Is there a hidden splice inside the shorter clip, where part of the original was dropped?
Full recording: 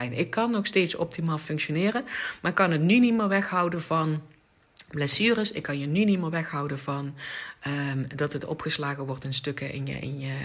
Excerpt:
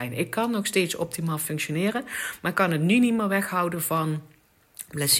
no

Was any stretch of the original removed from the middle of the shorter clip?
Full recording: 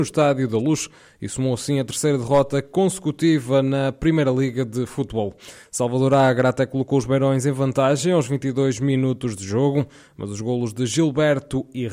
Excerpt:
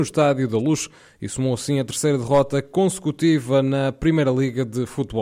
no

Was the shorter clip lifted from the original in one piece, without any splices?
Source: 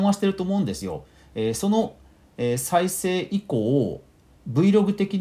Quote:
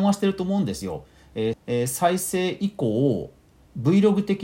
no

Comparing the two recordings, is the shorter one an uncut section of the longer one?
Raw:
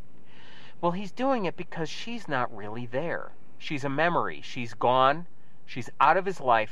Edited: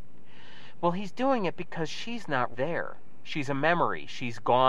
no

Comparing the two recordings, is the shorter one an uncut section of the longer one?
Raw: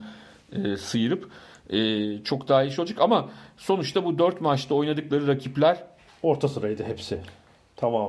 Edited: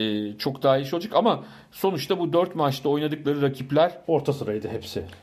no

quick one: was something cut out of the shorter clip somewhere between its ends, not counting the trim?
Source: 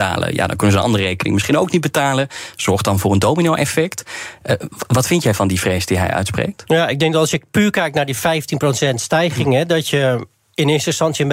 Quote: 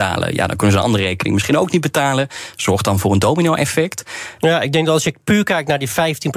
yes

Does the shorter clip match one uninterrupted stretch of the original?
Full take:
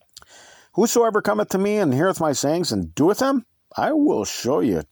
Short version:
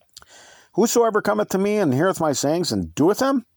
yes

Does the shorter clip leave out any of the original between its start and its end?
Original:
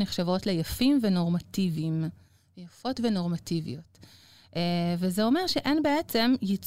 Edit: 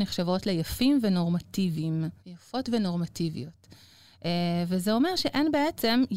yes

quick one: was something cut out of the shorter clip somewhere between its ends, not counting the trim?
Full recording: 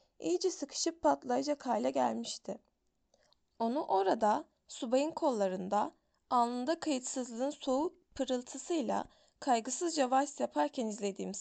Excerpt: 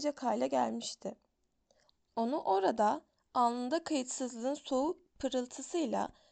yes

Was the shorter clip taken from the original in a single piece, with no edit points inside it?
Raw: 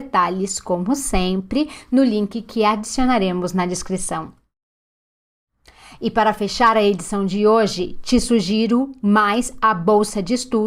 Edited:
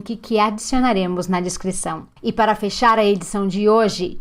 no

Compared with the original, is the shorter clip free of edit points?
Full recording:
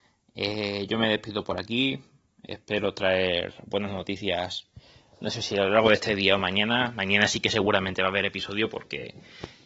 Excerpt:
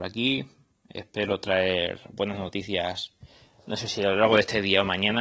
yes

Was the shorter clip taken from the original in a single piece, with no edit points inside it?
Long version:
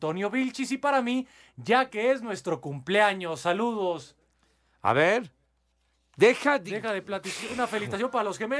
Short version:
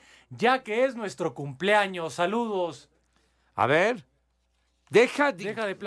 yes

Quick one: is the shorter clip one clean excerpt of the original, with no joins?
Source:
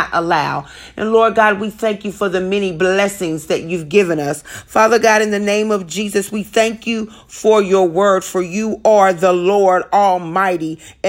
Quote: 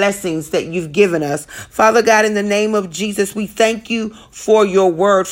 yes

